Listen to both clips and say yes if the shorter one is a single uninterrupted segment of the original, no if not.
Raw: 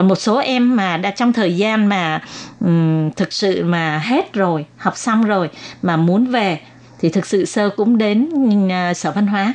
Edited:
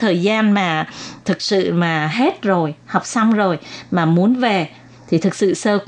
no